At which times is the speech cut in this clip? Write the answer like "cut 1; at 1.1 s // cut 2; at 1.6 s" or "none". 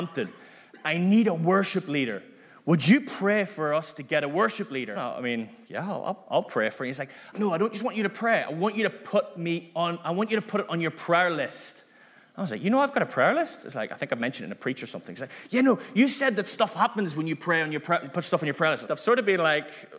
cut 1; at 5.0 s // cut 2; at 7.3 s // cut 3; at 18.9 s